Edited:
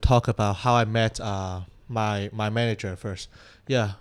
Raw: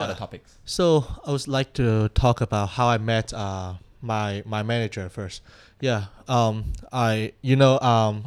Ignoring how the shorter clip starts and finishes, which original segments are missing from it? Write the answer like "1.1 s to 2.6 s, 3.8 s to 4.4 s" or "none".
none